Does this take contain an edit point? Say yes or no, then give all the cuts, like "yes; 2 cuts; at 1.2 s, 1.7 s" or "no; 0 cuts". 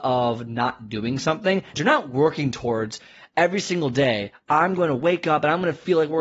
yes; 1 cut; at 1.7 s